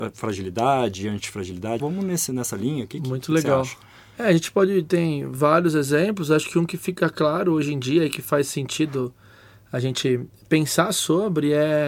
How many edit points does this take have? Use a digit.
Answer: 1